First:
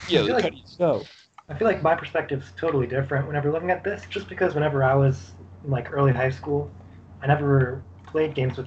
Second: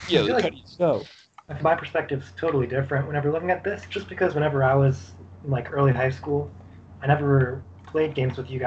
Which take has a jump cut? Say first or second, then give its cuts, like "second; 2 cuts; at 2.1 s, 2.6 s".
second; 1 cut; at 1.6 s